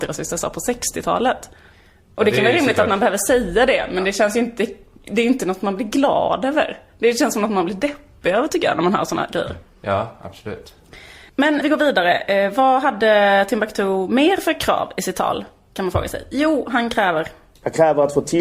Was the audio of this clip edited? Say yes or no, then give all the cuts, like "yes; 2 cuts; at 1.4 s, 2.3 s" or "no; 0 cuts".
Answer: yes; 1 cut; at 11.6 s